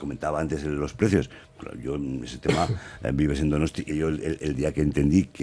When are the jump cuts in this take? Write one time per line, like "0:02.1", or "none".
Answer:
0:03.9